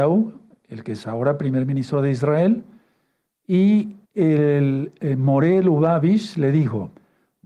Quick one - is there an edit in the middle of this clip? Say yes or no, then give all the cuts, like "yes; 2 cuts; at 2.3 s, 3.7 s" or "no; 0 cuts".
yes; 1 cut; at 4.0 s